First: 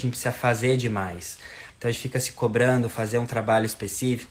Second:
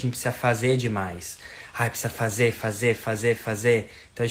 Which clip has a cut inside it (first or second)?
first